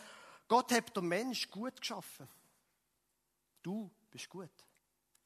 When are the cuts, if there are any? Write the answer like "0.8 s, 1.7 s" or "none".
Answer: none